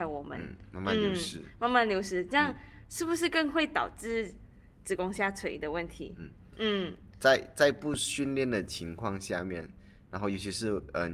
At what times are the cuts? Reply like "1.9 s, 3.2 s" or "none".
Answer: none